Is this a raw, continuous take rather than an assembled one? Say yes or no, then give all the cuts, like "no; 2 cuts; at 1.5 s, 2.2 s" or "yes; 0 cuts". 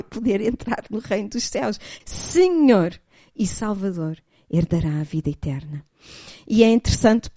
no; 1 cut; at 2.0 s